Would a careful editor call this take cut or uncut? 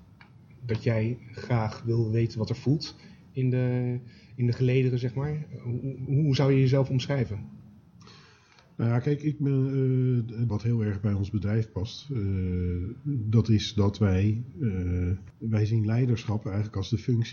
cut